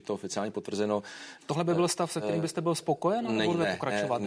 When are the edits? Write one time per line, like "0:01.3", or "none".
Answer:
0:01.4